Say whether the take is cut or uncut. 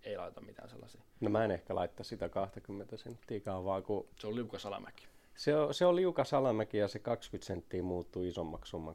uncut